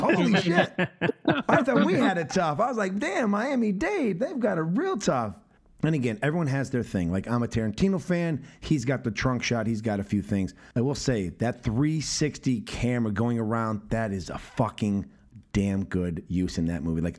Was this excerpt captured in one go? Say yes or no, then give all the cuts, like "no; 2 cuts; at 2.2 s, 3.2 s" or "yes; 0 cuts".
yes; 0 cuts